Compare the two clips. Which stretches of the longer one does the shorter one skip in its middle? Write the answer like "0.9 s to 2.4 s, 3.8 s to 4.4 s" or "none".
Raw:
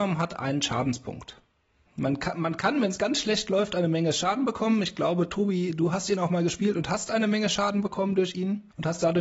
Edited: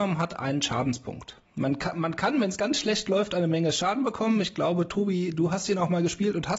1.4 s to 1.9 s